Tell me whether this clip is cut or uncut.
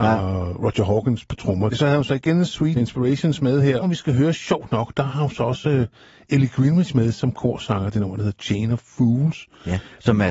cut